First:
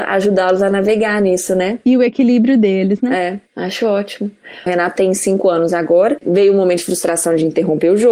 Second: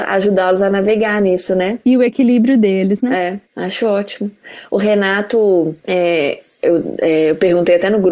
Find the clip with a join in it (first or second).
first